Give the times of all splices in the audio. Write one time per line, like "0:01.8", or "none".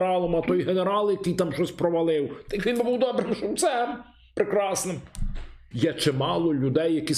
0:05.7